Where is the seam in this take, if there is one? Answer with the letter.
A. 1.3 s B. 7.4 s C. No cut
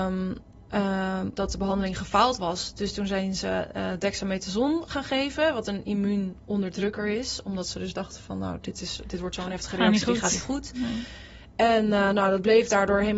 A